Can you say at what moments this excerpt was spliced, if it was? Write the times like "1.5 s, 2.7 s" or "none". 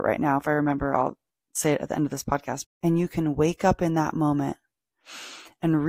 2.6 s